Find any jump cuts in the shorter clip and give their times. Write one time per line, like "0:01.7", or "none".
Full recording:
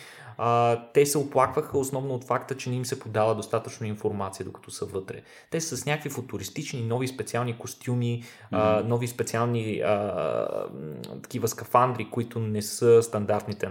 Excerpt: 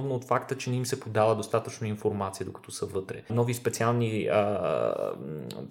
0:03.3